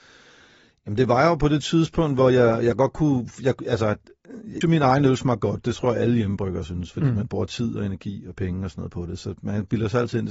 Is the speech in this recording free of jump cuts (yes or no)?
no